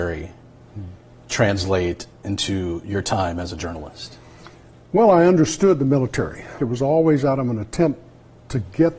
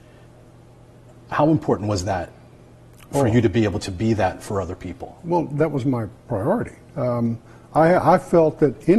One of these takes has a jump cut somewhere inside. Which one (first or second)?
first